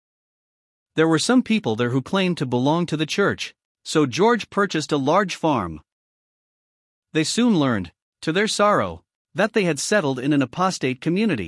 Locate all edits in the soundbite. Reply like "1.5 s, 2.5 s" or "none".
none